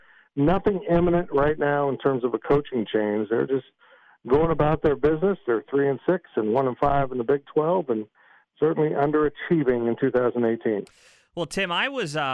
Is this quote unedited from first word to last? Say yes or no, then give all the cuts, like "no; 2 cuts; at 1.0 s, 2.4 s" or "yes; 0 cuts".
yes; 0 cuts